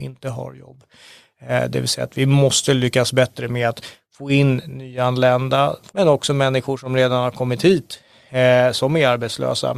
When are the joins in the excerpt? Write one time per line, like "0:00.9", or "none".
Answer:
0:05.9